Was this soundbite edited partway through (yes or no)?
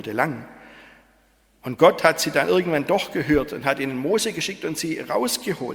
no